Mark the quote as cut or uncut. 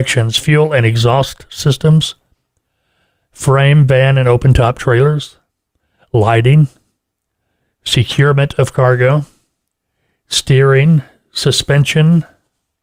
uncut